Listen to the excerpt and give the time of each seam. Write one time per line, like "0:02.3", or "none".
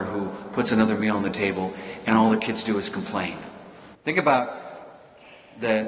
0:03.9

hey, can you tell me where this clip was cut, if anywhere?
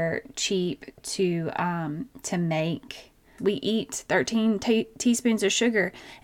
0:03.4

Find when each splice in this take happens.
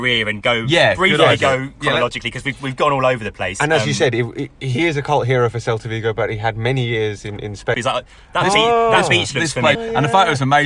0:07.7
0:09.8

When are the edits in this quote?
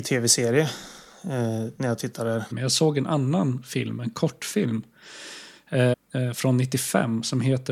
0:02.5
0:05.9

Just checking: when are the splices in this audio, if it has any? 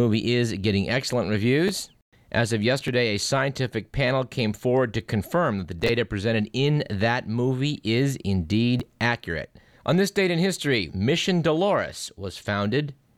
0:09.8
0:10.9

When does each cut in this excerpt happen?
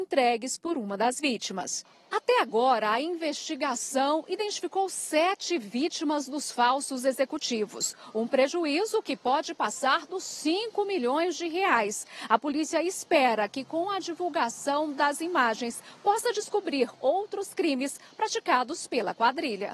none

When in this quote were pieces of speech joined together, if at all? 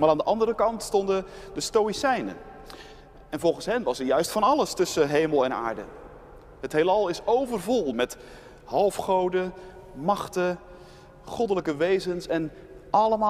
0:07.9

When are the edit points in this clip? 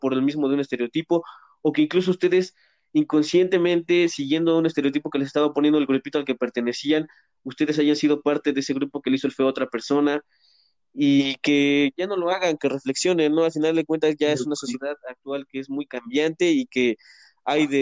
0:12.6

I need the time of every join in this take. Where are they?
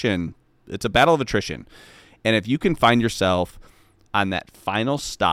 0:04.1

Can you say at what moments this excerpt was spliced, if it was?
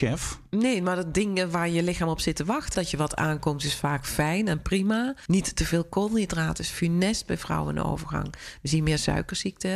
0:02.7
0:05.3

